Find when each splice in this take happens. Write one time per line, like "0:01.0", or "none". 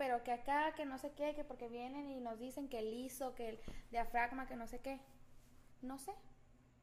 none